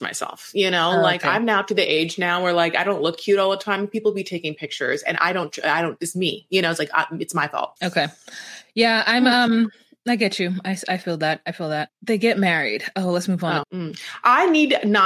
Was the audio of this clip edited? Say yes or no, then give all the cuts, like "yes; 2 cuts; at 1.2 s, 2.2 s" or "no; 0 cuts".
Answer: yes; 3 cuts; at 7.8 s, 11.9 s, 13.6 s